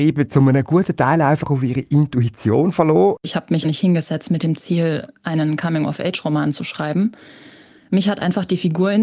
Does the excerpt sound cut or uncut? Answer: cut